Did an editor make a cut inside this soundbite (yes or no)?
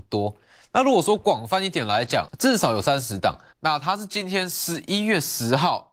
yes